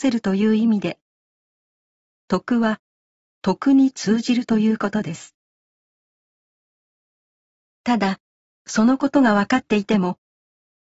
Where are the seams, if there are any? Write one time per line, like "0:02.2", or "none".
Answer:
none